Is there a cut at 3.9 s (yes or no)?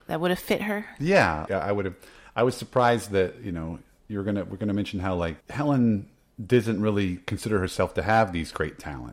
no